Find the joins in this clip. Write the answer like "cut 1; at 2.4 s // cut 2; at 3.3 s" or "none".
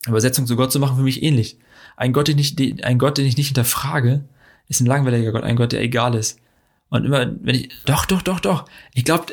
cut 1; at 7.8 s